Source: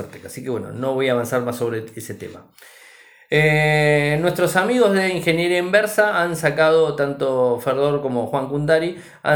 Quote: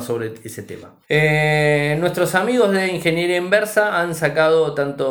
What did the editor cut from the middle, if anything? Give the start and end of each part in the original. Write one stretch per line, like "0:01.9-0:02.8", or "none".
0:02.5-0:03.2